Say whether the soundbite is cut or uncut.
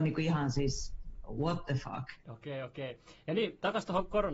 cut